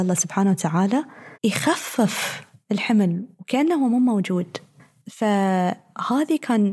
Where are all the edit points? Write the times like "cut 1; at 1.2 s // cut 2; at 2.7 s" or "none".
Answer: cut 1; at 1.3 s